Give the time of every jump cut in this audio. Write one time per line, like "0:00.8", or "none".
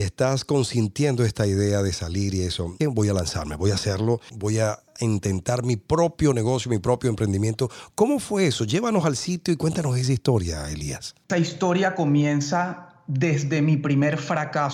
0:02.8
0:04.3